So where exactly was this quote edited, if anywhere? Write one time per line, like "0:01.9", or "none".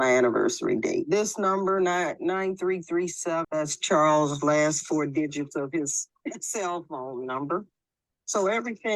0:03.4